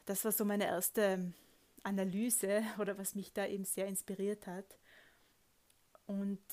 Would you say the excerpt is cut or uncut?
uncut